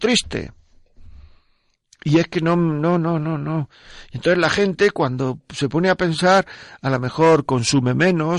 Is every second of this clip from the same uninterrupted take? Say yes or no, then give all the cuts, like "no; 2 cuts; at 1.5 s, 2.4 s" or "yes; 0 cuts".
yes; 0 cuts